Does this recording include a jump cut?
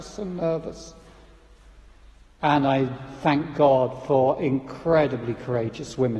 yes; 1 cut; at 2.4 s

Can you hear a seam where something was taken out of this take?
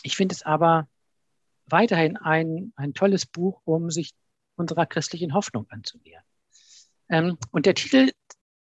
no; 0 cuts

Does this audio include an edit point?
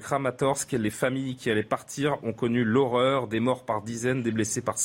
no; 0 cuts

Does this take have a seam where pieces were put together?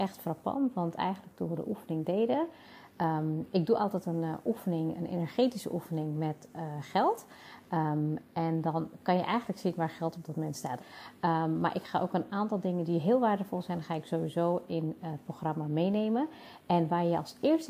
yes; 1 cut; at 10.8 s

